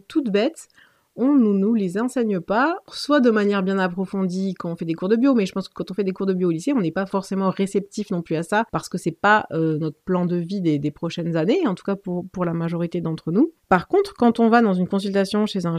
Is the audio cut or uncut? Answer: uncut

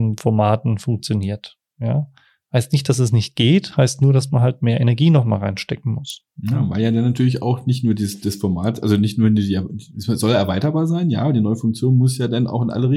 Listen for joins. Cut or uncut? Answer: uncut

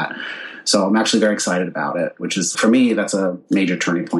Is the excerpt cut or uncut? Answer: cut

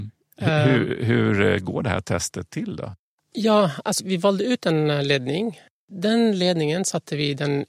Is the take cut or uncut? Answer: cut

